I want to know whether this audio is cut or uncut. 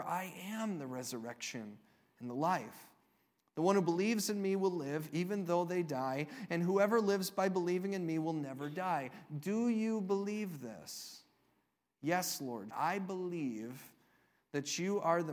cut